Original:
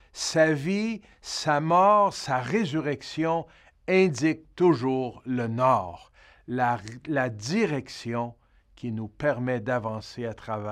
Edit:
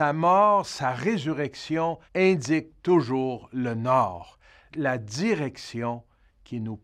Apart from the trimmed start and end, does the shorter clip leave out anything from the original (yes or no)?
yes